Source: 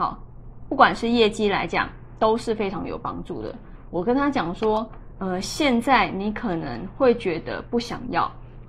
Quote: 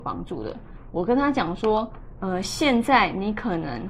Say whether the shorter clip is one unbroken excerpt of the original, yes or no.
yes